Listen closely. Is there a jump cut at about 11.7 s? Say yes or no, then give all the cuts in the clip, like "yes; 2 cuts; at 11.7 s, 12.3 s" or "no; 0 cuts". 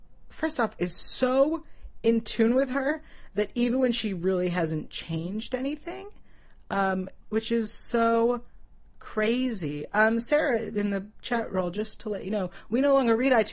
no; 1 cut; at 7.2 s